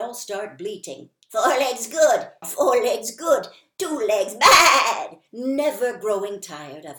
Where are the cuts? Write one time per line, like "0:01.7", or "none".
0:02.4
0:05.3